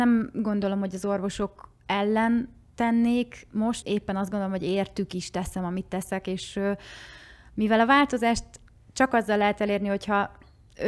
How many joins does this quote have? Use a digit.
1